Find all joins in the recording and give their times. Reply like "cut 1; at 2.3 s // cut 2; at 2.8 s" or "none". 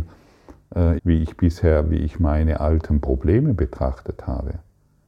cut 1; at 1.0 s